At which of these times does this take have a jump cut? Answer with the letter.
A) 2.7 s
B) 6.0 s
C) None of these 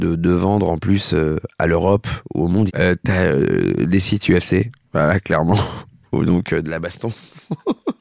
A